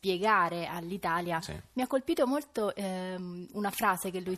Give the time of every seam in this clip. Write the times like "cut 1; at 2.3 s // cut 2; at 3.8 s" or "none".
cut 1; at 1.7 s